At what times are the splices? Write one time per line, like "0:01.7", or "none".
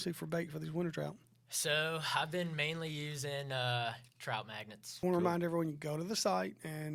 0:05.0